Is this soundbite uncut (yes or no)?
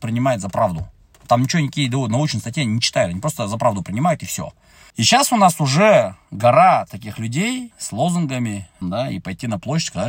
no